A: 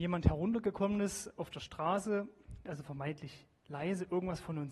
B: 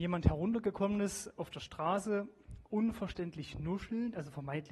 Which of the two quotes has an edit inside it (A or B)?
A